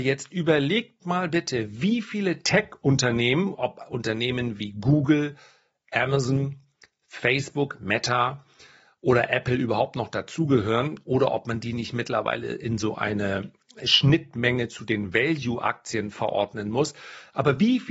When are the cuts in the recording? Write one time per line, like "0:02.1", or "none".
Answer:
0:03.5